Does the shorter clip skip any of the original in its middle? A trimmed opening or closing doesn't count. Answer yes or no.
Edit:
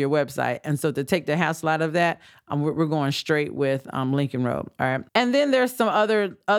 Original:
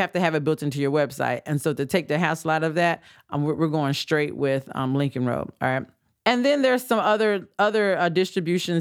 yes